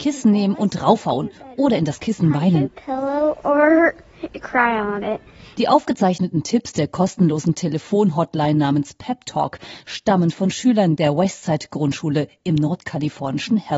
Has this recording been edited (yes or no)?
no